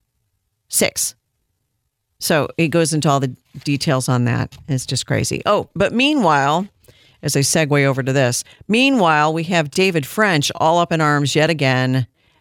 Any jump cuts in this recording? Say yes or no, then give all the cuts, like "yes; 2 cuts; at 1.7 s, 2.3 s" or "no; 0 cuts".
no; 0 cuts